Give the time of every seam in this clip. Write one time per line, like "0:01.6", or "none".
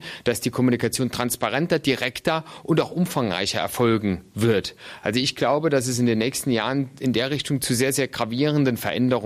none